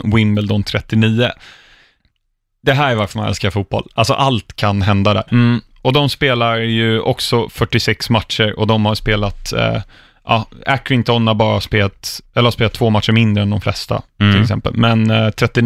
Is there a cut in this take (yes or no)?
yes